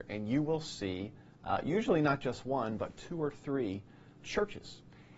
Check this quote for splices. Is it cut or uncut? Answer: cut